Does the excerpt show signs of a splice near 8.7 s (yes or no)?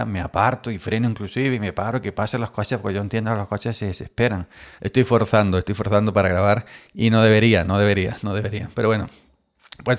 no